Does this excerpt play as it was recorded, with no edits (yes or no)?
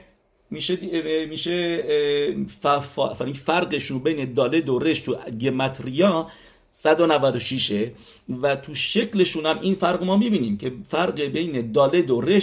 yes